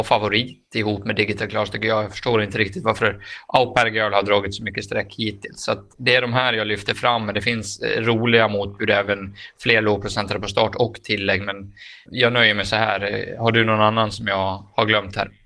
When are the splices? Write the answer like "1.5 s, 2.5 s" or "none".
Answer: 12.1 s